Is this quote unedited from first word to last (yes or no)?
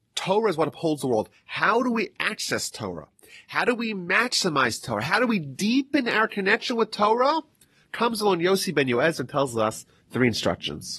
yes